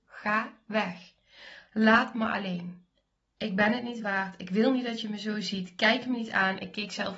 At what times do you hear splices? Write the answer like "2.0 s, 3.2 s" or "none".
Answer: 1.7 s